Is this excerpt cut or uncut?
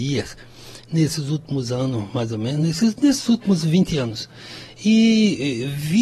uncut